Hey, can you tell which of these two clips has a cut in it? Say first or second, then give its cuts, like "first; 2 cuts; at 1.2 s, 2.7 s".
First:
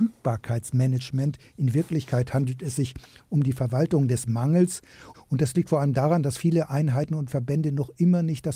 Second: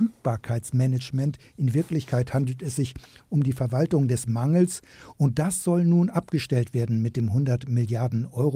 first; 1 cut; at 5.1 s